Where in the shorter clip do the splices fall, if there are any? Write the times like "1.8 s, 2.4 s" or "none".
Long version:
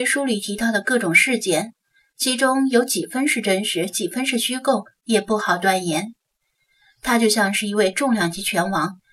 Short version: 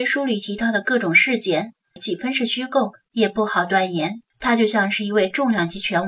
2.0 s, 4.3 s